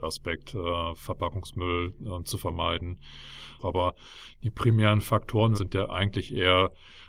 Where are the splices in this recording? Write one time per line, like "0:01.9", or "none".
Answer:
0:03.6
0:05.5